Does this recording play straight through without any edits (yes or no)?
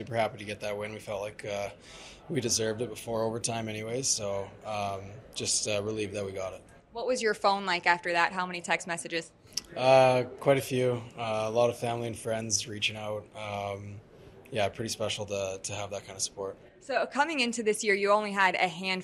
yes